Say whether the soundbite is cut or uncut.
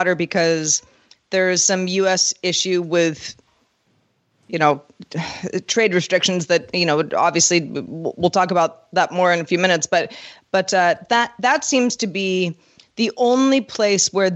uncut